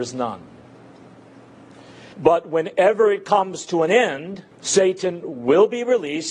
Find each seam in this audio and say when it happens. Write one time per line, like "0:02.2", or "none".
0:02.1
0:04.5